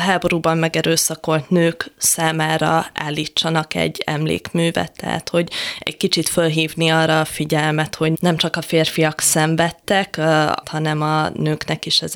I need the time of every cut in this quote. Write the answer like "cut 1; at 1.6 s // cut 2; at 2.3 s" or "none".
cut 1; at 8.1 s // cut 2; at 10.6 s